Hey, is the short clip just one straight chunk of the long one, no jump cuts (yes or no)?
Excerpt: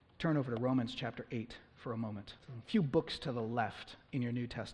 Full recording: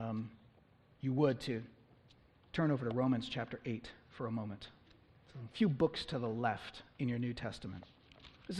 no